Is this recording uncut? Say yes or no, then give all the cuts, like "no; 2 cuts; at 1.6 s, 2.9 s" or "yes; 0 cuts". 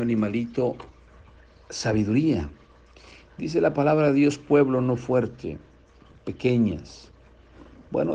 yes; 0 cuts